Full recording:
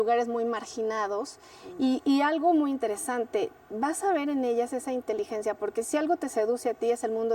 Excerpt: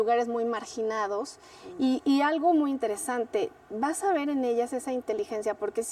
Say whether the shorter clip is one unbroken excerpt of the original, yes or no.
yes